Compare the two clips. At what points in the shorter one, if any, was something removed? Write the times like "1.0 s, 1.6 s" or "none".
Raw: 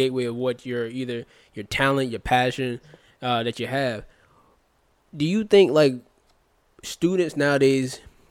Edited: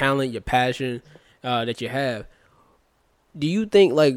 none